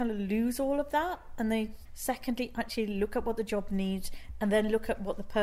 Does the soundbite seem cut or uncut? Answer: cut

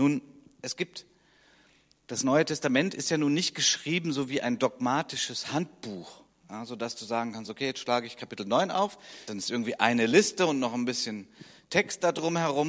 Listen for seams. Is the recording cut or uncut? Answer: cut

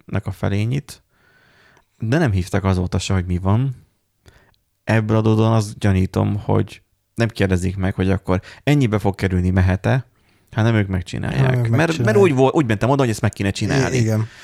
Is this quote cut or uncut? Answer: uncut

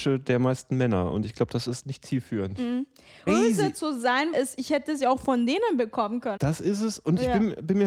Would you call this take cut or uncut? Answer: cut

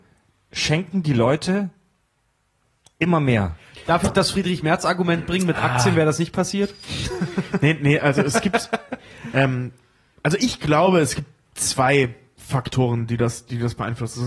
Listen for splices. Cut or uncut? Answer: uncut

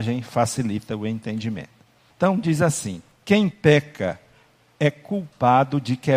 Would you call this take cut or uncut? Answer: uncut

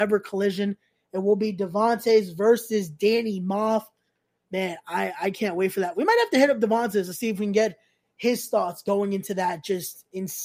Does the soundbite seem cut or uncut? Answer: uncut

